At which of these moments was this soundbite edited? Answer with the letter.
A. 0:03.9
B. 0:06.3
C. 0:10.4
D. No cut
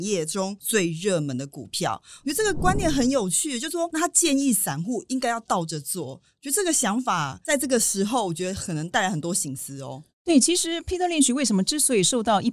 A